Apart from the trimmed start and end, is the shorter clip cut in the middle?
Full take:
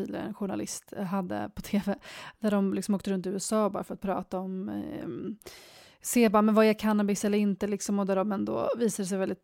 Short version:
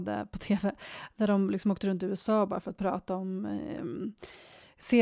no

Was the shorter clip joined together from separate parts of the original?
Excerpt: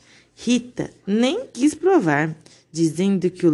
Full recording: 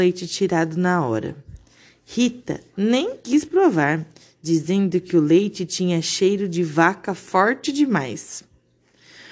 no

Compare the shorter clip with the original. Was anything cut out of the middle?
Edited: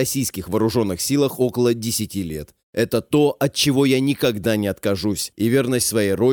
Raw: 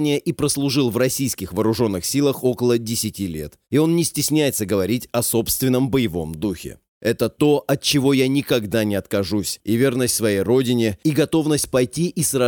yes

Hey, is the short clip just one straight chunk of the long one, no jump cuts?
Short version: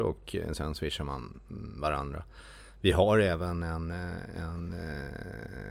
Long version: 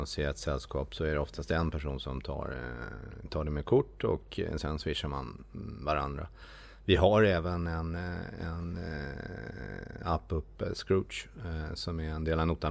yes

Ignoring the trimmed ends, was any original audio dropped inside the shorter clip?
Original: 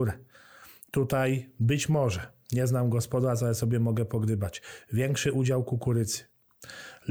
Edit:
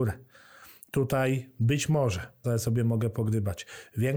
yes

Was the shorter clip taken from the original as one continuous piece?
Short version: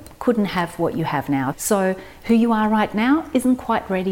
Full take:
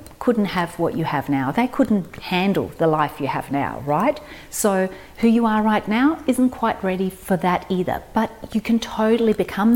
no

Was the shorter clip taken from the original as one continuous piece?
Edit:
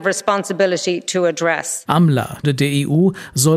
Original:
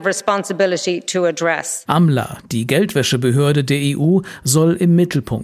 no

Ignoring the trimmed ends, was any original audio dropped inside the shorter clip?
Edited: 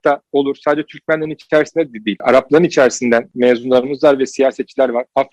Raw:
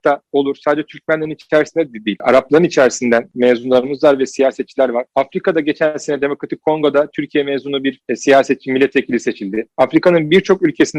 no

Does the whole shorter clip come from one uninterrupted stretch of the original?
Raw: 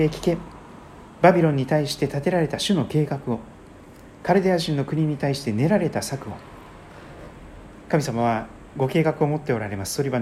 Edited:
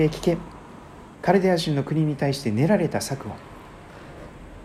no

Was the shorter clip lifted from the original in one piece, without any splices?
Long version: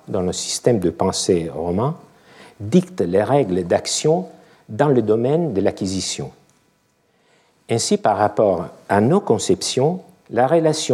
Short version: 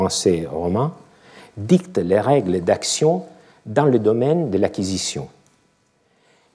yes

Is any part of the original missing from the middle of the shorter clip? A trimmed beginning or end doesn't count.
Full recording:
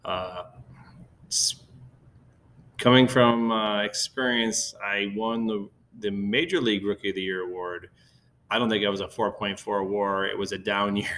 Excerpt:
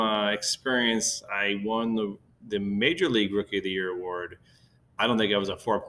no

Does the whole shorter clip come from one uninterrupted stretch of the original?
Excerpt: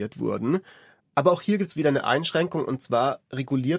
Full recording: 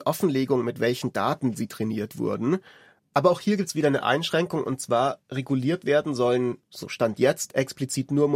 yes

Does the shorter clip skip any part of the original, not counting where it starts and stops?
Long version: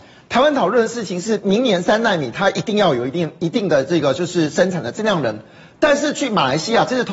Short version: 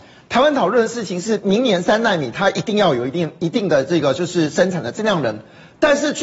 no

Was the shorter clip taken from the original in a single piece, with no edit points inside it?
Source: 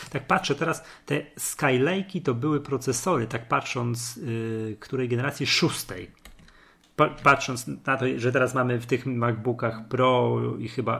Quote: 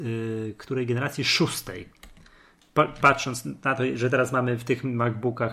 yes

